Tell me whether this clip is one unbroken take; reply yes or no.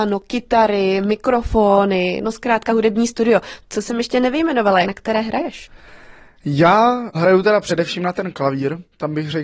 no